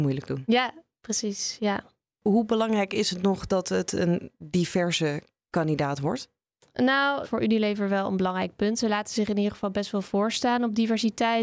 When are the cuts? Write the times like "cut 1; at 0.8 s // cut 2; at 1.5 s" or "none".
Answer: cut 1; at 7.2 s